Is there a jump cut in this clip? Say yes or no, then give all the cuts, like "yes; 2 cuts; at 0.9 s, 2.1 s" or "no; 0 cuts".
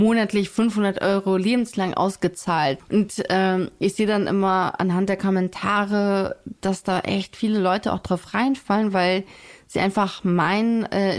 yes; 1 cut; at 2.8 s